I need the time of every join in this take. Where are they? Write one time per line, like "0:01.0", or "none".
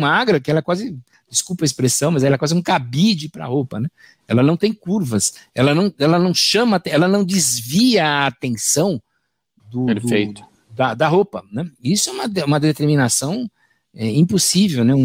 none